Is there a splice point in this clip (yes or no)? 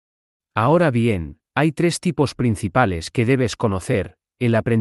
yes